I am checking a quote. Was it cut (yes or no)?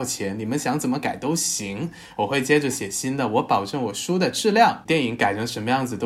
no